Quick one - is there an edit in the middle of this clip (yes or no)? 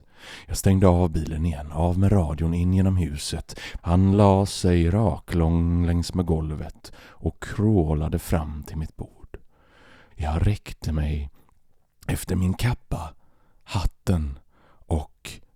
yes